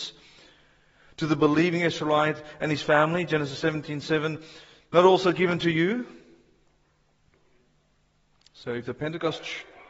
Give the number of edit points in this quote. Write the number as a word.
zero